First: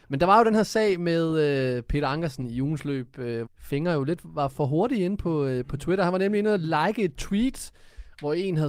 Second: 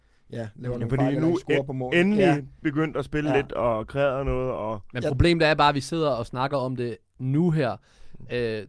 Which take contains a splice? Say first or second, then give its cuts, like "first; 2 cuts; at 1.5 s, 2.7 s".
first; 1 cut; at 3.5 s